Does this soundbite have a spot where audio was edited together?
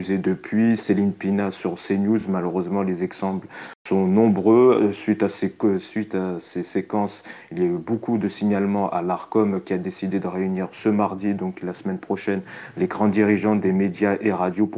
no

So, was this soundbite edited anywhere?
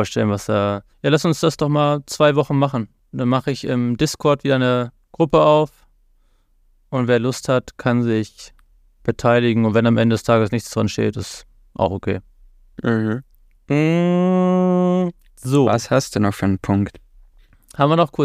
yes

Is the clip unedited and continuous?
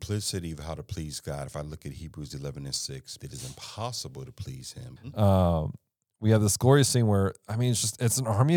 no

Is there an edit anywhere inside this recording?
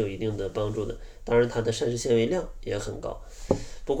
no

